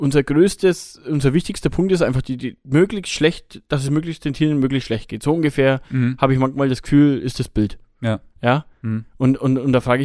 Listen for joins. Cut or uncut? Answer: uncut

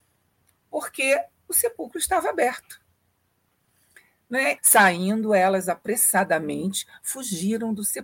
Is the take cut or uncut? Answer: cut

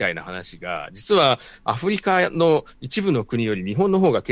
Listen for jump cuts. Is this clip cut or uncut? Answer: uncut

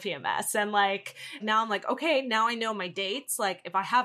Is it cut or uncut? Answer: cut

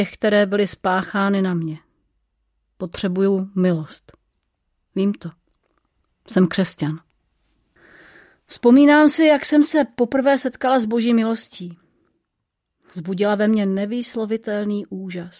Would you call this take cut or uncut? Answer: uncut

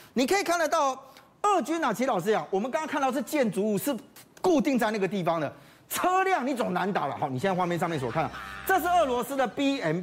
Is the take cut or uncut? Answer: uncut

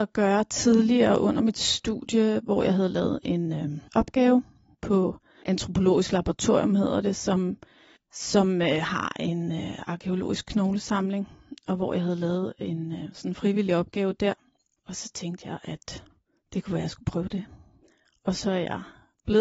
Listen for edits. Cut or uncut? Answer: uncut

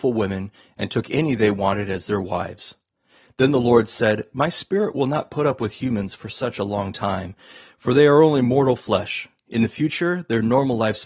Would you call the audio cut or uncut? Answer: uncut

